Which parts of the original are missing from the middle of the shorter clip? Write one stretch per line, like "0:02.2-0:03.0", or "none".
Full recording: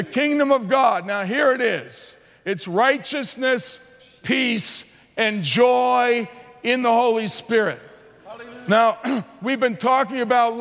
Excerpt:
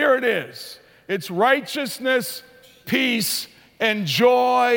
none